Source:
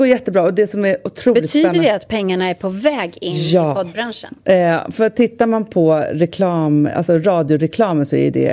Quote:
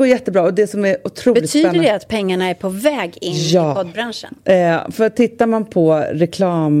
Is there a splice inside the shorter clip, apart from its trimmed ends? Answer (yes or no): no